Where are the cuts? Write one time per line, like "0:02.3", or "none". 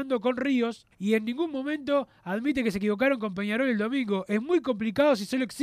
0:00.9